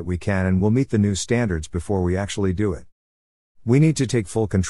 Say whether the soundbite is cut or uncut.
uncut